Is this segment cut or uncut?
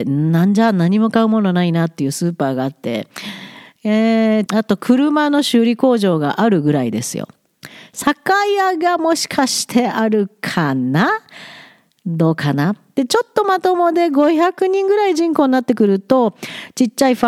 cut